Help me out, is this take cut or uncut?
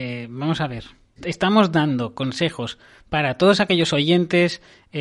cut